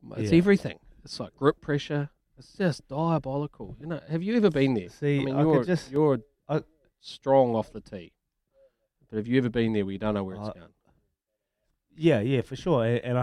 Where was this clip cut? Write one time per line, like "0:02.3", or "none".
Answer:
none